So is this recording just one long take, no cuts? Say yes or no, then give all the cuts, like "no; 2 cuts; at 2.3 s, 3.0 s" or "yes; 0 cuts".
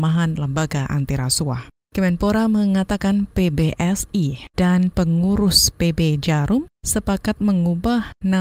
no; 2 cuts; at 1.9 s, 4.5 s